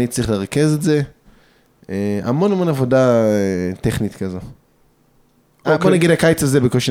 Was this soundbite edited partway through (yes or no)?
no